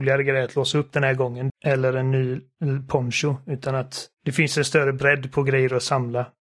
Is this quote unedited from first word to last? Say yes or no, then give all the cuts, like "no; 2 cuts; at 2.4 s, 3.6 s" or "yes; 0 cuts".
no; 2 cuts; at 1.5 s, 4.1 s